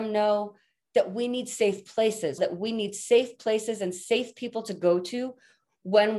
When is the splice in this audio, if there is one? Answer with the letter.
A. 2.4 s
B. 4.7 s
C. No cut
A